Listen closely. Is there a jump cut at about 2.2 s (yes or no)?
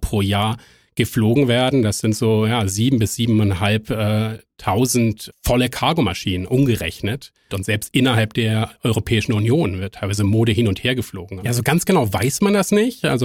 no